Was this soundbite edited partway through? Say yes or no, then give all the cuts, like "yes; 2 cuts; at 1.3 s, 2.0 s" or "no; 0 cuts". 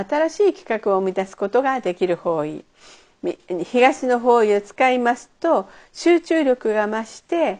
no; 0 cuts